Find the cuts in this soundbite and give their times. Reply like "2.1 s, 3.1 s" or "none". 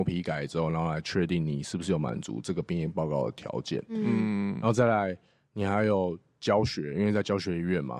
none